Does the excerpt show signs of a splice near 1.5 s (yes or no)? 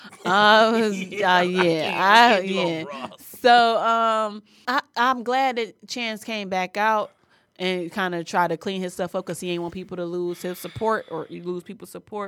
no